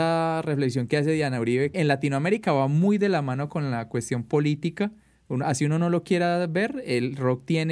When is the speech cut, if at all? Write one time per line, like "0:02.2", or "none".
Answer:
0:01.7